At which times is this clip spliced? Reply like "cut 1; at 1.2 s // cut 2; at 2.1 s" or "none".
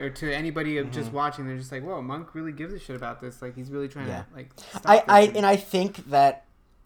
none